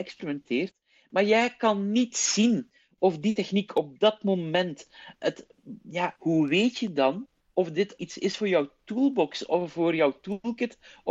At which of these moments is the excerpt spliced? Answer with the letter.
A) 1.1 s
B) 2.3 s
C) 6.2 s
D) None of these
C